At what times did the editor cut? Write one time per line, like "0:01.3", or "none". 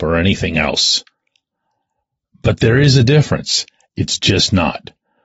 0:03.9